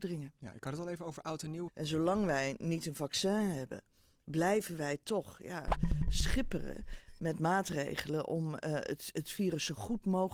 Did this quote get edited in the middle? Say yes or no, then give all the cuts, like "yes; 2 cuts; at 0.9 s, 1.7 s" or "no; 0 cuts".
yes; 1 cut; at 1.7 s